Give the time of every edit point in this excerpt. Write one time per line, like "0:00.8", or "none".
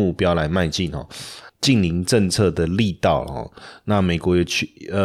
0:01.5

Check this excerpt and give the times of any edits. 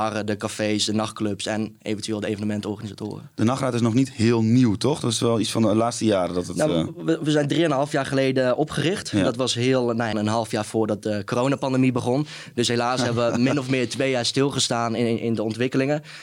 0:10.1

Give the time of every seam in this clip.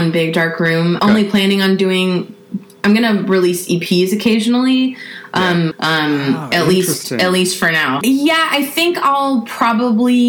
0:01.0
0:05.7
0:08.0

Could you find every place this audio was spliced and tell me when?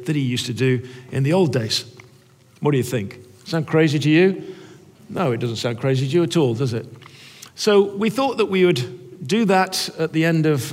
none

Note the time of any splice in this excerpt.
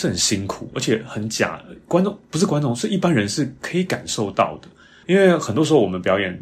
0:05.0

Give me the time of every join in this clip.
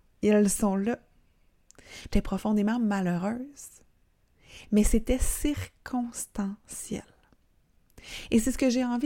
0:02.1

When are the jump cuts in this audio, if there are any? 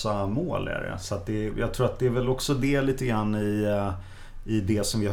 0:01.5

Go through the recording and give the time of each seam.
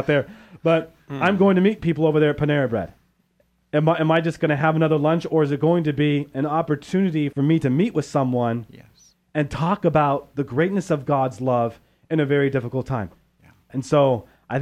none

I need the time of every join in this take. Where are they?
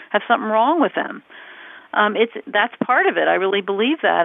none

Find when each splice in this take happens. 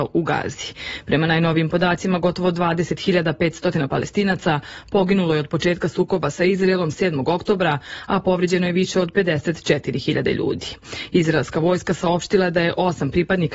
none

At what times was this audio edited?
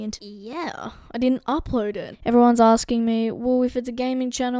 0:02.1

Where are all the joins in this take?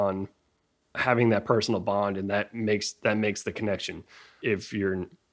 0:00.9

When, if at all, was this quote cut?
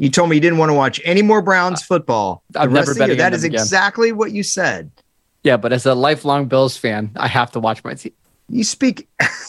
none

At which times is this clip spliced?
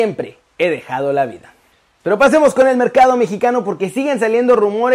0:02.0

